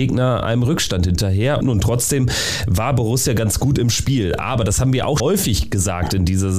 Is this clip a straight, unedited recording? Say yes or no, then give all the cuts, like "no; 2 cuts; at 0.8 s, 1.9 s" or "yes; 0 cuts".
no; 2 cuts; at 1.6 s, 5.2 s